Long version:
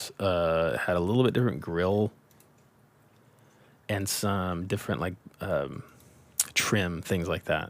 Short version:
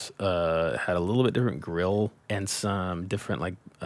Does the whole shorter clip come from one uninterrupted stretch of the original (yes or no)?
no